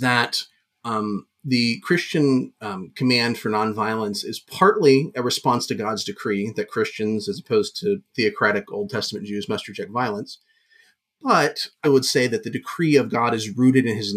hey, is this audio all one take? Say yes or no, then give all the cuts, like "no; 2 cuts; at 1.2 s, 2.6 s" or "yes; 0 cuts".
no; 1 cut; at 11.8 s